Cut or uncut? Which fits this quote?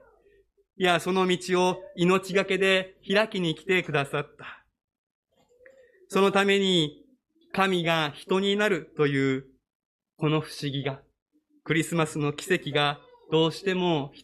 uncut